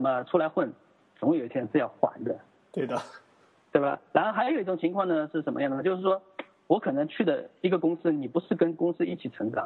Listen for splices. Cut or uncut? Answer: uncut